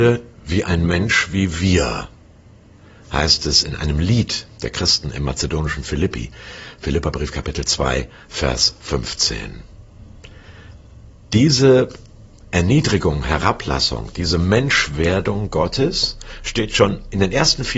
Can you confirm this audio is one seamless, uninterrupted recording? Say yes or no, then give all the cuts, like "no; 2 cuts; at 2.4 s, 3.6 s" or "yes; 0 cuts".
yes; 0 cuts